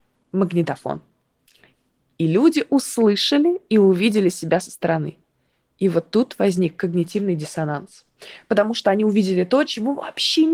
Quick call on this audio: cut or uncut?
uncut